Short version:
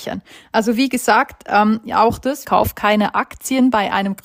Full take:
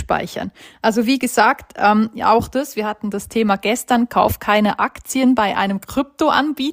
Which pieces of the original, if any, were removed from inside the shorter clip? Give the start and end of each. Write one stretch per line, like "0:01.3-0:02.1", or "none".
0:02.7-0:04.1

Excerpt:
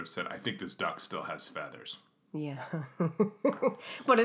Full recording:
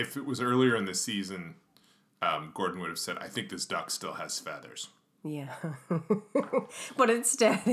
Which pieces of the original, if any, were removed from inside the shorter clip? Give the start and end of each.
none

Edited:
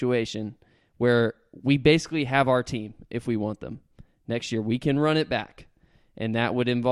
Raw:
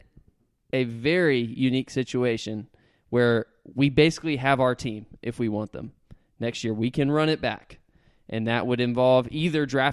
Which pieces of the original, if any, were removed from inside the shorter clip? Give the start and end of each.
none

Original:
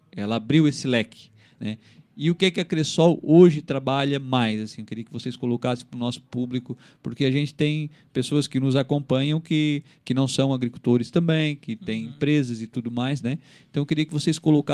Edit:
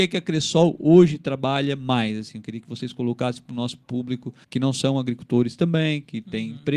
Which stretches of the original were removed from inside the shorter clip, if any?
0:06.9-0:10.0

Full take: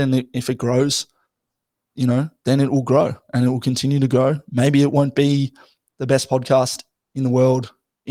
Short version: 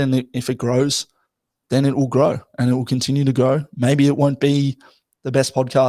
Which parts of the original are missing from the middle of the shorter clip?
0:01.6-0:02.4

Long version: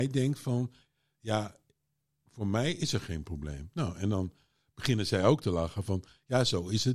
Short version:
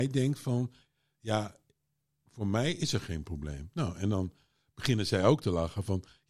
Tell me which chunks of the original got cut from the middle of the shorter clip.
none

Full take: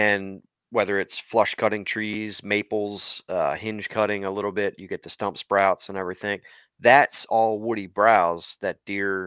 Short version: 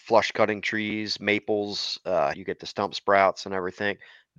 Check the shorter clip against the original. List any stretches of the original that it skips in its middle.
0:03.6-0:04.8

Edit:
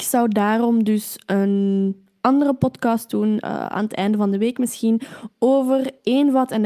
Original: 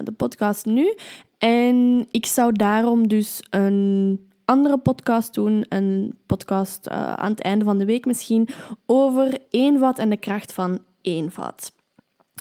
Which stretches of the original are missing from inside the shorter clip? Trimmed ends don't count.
0:05.7-0:06.9

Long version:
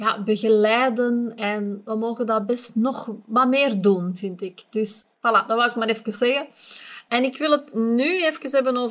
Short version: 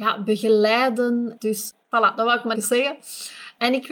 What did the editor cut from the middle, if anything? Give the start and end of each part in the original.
0:01.4-0:04.7
0:05.9-0:06.0

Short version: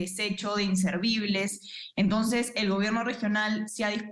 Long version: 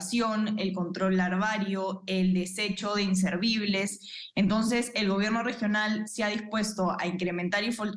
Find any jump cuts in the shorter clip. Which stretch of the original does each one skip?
none

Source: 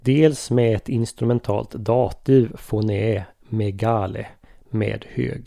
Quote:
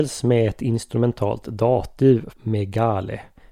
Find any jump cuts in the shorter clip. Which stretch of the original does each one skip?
0:02.6-0:03.4

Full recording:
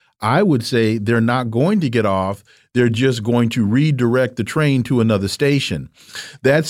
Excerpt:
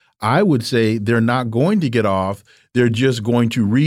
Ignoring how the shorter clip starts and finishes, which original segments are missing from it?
none

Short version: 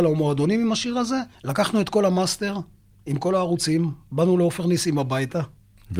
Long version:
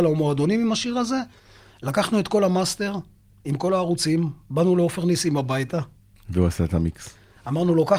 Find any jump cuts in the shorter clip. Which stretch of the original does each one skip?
0:01.3-0:01.7

